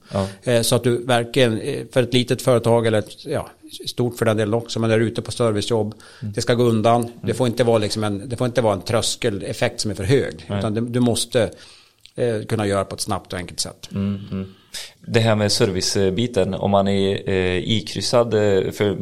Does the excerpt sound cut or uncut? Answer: uncut